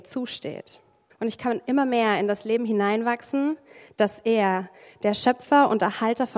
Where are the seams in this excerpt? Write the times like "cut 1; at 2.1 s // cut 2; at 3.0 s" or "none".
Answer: cut 1; at 1.1 s

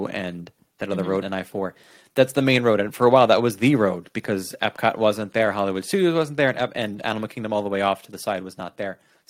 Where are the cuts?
cut 1; at 1.2 s

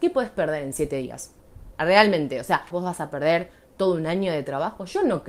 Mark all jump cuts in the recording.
cut 1; at 2.7 s

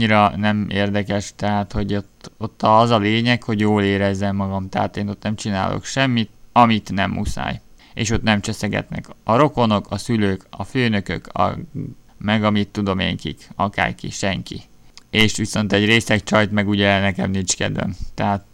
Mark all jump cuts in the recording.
cut 1; at 15.0 s

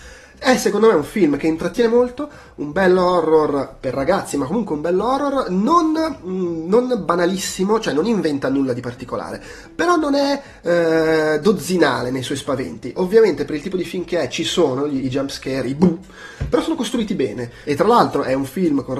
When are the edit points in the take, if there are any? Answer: cut 1; at 17.6 s

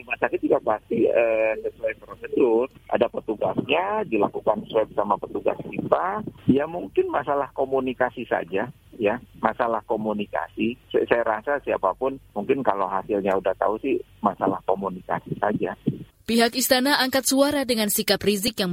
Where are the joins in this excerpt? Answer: none

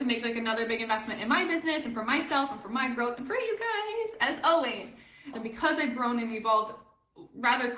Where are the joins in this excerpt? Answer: cut 1; at 5.3 s

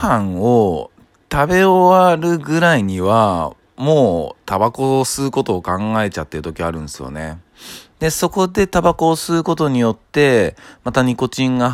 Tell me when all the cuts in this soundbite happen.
cut 1; at 7.9 s

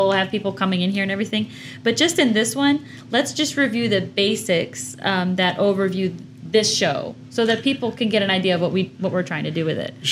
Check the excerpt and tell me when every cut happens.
none

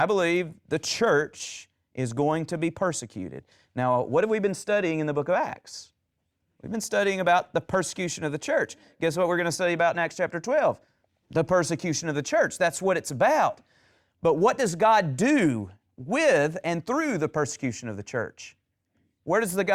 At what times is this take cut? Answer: none

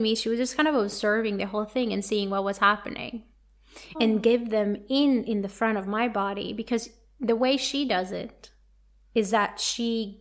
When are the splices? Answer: cut 1; at 3.9 s

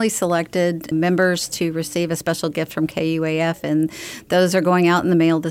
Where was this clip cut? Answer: cut 1; at 0.9 s

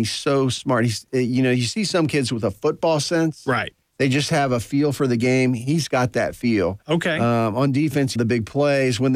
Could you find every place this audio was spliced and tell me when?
cut 1; at 8.2 s

